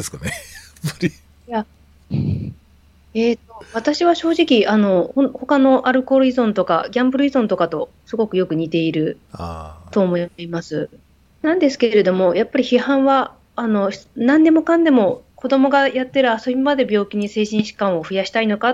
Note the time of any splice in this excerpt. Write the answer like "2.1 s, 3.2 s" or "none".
none